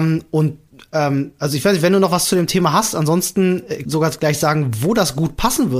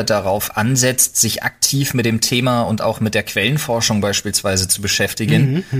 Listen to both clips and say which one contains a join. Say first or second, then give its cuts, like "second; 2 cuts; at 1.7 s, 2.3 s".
first; 1 cut; at 3.8 s